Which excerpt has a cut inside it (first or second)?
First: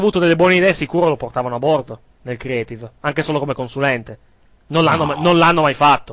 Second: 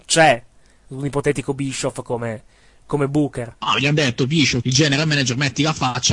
second